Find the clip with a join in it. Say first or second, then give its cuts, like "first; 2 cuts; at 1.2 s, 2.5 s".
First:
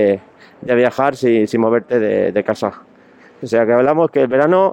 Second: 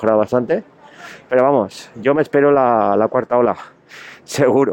first; 1 cut; at 3.4 s